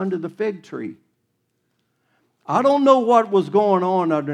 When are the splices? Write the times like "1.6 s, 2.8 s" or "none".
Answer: none